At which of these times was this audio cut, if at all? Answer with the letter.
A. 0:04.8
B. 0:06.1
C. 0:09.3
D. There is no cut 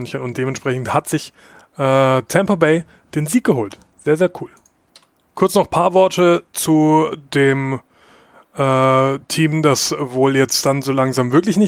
D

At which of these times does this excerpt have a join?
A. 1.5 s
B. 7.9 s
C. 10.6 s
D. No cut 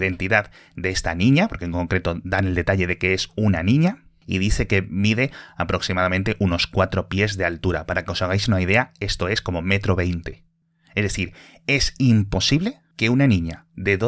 D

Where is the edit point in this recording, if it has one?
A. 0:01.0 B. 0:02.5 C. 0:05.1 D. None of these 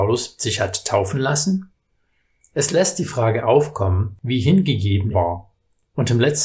C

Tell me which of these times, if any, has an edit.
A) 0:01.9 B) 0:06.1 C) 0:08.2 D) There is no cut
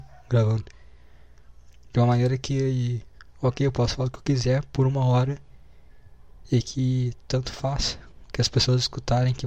D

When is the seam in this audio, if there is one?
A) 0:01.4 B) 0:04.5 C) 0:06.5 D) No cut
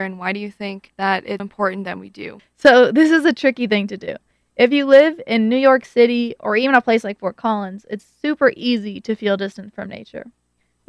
A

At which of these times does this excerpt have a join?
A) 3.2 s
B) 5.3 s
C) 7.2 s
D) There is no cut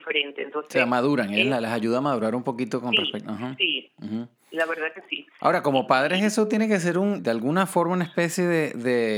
C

